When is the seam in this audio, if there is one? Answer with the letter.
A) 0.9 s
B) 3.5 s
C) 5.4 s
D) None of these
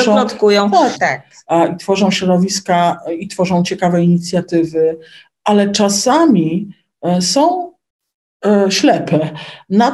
A